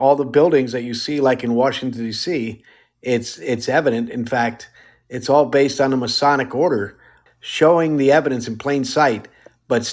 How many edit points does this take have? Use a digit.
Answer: 1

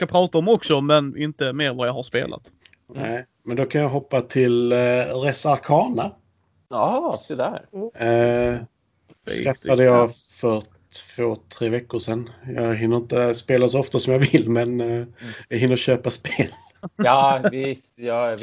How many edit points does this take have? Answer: 0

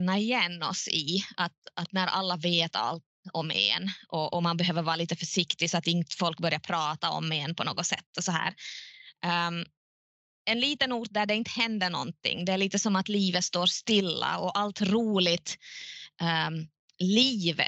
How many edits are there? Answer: 0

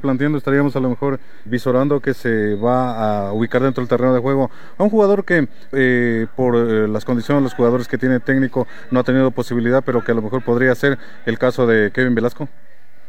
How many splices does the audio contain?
2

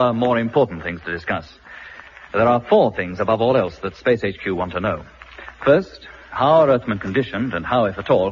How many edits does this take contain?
0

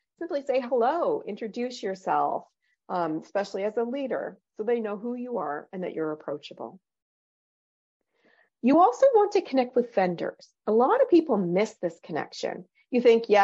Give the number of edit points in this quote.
0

